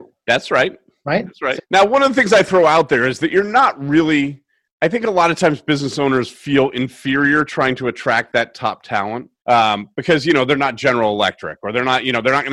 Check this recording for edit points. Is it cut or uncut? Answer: cut